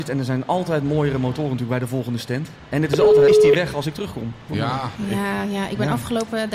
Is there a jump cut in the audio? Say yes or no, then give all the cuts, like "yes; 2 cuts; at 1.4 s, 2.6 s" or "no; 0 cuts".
yes; 2 cuts; at 3.3 s, 4.5 s